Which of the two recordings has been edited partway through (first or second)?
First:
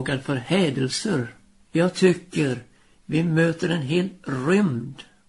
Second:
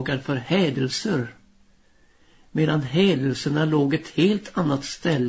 first